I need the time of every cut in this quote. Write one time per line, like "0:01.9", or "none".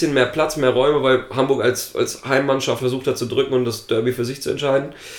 0:02.8